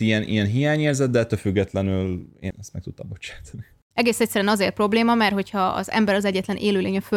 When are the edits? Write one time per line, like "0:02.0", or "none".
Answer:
0:02.5
0:03.9